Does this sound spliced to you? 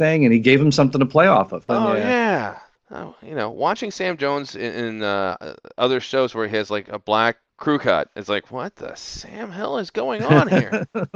yes; 1 cut; at 1.7 s

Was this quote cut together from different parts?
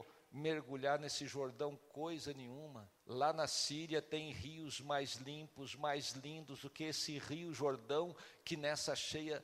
yes; 1 cut; at 3.0 s

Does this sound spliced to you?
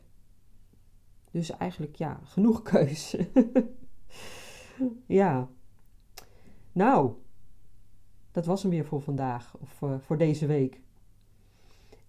no; 0 cuts

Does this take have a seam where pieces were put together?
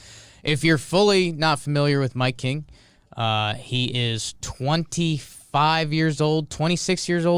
no; 0 cuts

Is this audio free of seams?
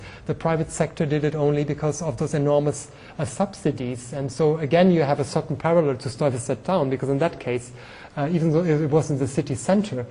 yes; 0 cuts

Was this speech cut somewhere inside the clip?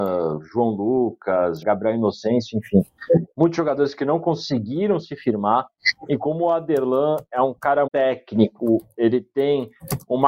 yes; 2 cuts; at 1.6 s, 7.9 s

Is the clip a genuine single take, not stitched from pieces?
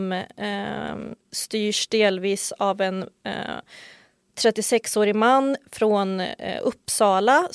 yes; 0 cuts

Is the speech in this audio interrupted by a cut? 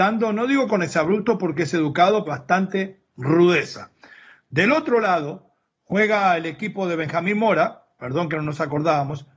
yes; 1 cut; at 2.3 s

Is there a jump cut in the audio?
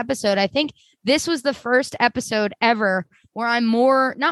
no; 0 cuts

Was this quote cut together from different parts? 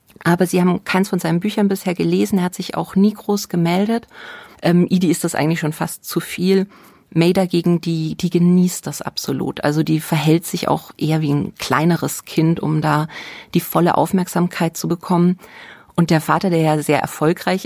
yes; 1 cut; at 4.5 s

